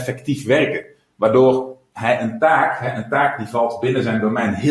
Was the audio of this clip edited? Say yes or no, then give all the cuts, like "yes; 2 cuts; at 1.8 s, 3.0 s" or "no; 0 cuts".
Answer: no; 0 cuts